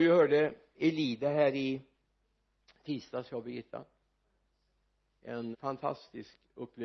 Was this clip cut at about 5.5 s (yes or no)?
yes